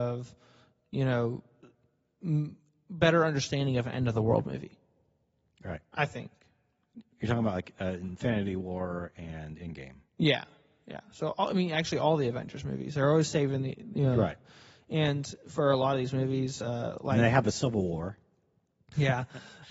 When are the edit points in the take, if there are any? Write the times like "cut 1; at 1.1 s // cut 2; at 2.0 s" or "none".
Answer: none